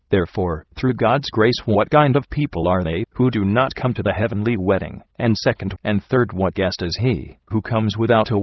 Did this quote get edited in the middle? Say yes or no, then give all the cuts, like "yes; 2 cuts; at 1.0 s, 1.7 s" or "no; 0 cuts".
yes; 1 cut; at 5.8 s